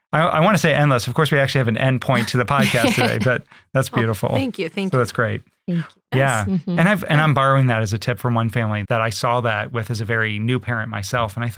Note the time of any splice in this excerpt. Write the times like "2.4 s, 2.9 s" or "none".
6.1 s, 8.8 s